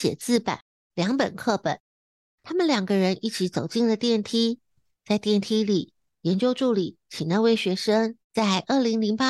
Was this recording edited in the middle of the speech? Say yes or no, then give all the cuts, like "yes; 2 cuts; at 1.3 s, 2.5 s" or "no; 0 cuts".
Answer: yes; 1 cut; at 8.2 s